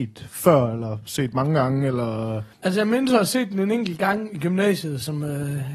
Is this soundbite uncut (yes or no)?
no